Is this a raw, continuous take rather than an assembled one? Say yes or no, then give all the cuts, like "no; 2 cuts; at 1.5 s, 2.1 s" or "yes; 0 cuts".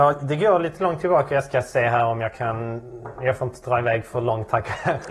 yes; 0 cuts